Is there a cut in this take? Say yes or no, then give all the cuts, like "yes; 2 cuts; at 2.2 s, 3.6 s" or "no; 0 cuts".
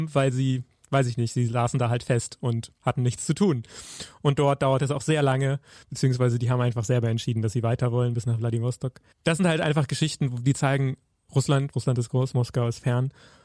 yes; 1 cut; at 11.7 s